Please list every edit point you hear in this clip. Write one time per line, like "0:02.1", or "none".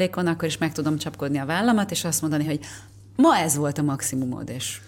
none